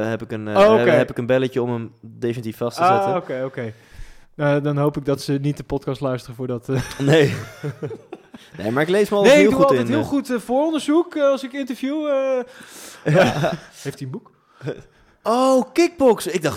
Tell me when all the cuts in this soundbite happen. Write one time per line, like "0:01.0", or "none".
none